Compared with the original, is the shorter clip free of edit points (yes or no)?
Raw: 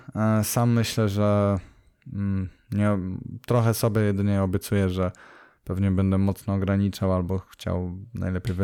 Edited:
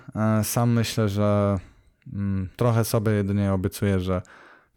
no